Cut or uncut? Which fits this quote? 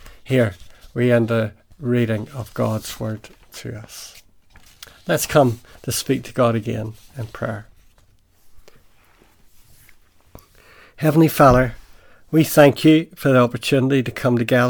uncut